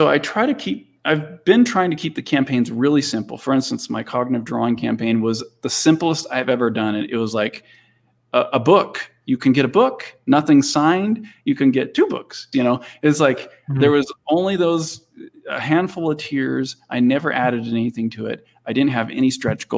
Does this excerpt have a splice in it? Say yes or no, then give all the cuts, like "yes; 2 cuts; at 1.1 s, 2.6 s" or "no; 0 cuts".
yes; 1 cut; at 12.5 s